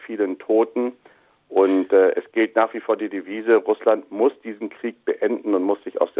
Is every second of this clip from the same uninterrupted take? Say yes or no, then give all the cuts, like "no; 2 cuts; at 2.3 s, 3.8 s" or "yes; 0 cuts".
yes; 0 cuts